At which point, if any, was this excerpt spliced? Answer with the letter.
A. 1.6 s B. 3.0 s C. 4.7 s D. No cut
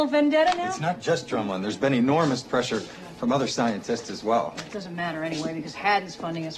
D